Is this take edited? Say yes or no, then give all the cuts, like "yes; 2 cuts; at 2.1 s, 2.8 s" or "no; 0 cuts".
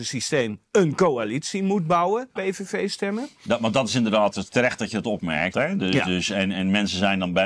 yes; 2 cuts; at 2.4 s, 5.5 s